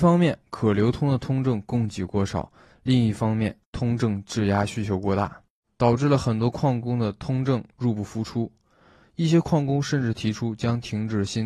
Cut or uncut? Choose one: uncut